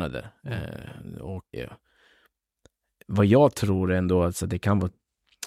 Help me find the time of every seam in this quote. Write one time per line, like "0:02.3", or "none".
0:01.5